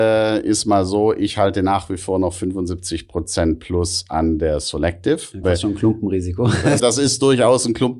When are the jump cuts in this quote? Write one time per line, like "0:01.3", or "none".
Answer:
0:05.4
0:06.8